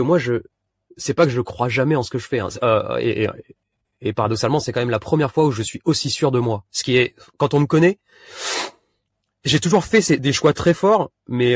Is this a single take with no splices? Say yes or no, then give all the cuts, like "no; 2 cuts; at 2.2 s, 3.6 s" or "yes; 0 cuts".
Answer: yes; 0 cuts